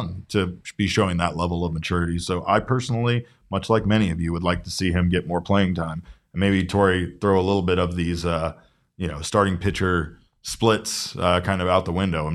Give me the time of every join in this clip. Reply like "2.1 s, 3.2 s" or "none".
none